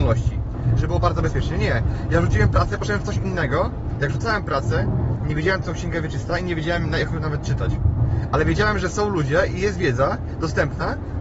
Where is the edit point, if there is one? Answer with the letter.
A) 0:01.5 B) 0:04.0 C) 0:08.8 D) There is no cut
D